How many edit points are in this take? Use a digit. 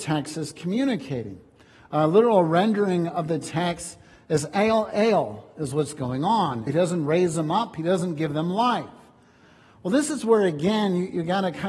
1